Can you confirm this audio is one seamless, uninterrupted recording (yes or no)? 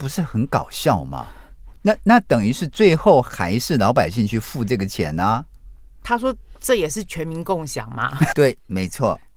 no